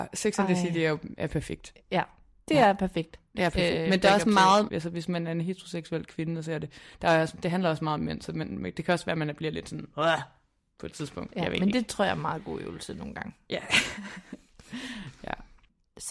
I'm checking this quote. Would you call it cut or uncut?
cut